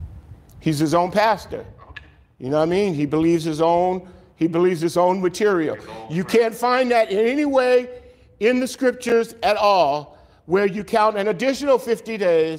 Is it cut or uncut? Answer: uncut